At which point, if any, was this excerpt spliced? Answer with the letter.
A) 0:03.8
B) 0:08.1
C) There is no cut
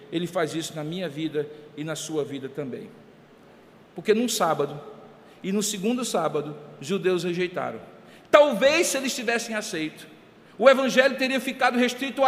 A